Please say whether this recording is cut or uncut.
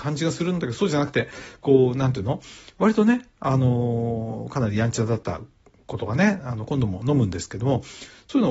uncut